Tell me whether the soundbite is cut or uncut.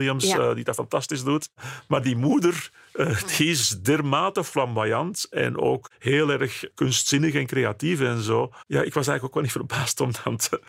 uncut